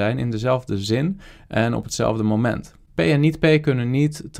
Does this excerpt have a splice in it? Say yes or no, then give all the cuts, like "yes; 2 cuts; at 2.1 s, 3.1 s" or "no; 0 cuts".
no; 0 cuts